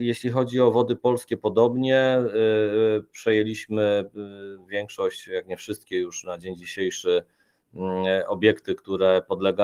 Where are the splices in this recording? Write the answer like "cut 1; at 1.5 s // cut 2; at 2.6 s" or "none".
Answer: none